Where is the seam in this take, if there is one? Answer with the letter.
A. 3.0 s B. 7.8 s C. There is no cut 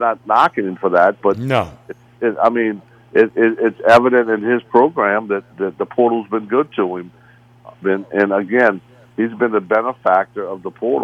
B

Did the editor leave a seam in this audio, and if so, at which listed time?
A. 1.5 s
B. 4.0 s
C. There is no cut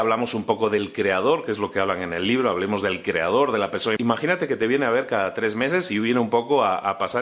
B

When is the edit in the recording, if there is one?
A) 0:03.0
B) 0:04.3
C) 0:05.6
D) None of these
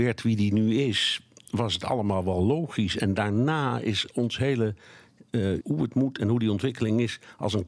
C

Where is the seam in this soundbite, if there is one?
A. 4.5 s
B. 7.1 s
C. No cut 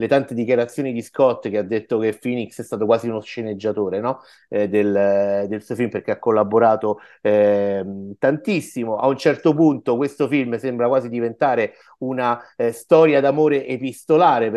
C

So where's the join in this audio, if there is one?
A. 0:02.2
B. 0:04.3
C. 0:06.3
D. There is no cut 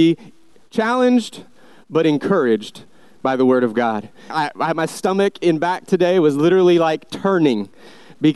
B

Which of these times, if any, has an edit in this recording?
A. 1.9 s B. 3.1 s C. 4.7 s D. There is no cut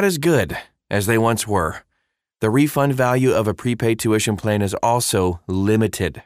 D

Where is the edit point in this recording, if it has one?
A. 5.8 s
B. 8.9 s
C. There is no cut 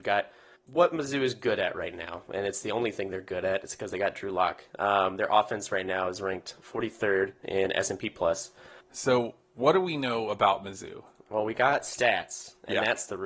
B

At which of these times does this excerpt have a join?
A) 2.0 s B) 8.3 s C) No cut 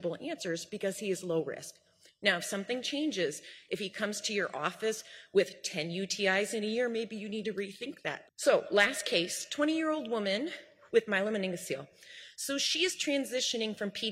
B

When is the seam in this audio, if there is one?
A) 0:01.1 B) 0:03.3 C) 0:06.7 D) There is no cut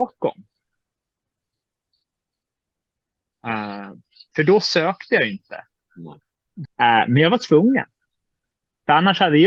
C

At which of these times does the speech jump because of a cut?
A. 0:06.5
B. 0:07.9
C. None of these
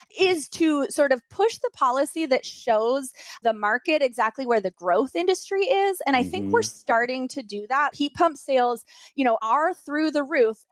B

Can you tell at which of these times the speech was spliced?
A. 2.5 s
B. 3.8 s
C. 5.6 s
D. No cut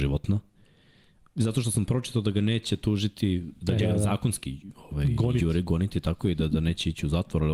B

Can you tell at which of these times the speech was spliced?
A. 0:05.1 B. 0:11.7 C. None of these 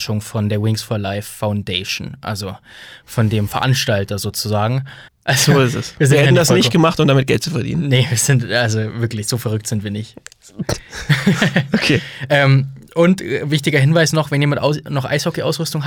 A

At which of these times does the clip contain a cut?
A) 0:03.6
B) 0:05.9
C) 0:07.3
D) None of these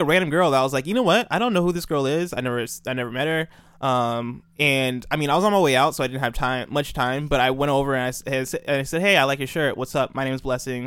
D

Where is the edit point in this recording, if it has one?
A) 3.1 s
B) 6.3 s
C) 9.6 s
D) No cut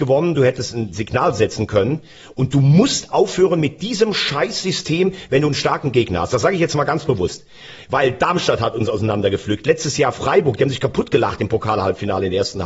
A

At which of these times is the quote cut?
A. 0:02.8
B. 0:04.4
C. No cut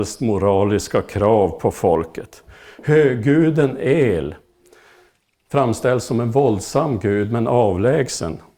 C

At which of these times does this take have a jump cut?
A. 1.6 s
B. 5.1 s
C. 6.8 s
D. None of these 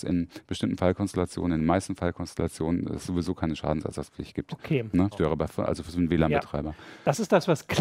B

